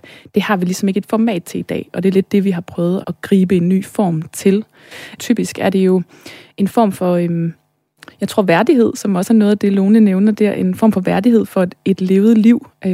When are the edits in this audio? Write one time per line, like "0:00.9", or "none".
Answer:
0:03.0
0:05.2